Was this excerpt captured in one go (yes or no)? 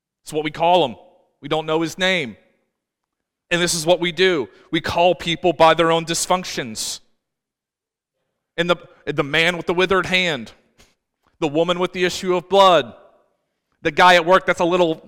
yes